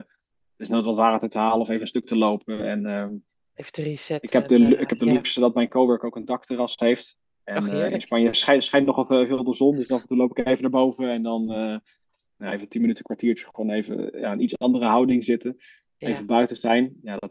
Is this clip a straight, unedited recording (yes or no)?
yes